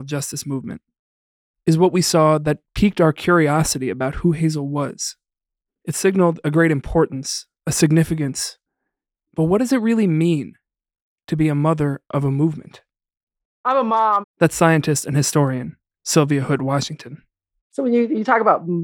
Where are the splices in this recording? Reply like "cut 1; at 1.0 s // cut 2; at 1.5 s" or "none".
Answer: cut 1; at 14.2 s